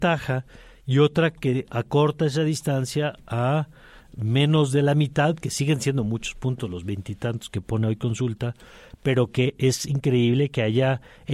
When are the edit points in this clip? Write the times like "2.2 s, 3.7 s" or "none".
none

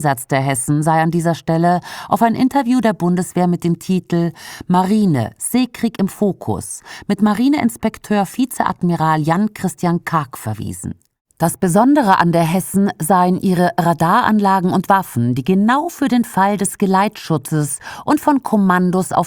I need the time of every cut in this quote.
none

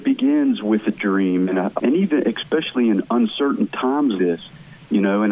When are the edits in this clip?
1.8 s, 4.2 s

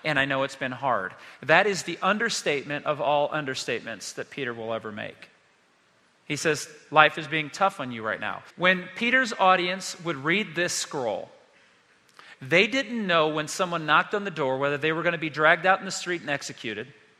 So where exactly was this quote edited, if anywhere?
8.5 s

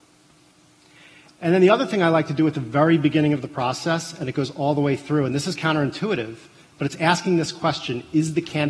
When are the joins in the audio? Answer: none

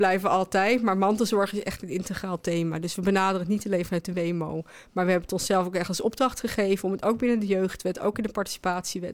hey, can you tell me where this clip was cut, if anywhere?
none

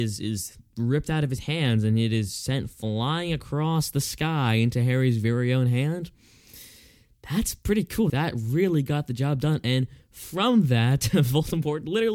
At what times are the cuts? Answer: 8.1 s

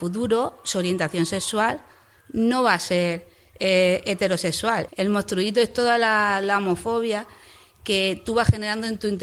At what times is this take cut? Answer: 4.9 s

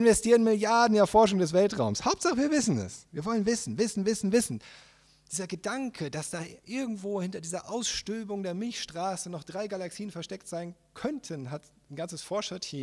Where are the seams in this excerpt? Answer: none

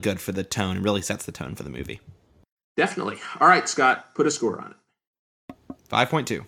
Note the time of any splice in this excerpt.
none

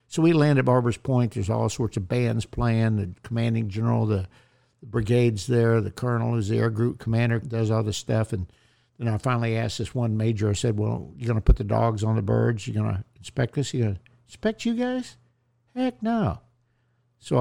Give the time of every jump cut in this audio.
7.4 s

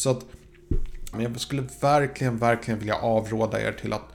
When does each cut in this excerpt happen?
1.1 s

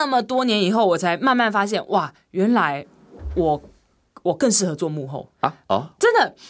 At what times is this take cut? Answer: 5.3 s

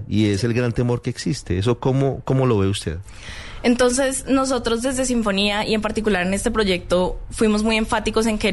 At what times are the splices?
none

